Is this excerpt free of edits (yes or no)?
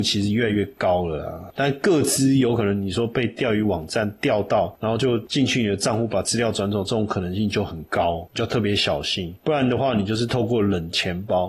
yes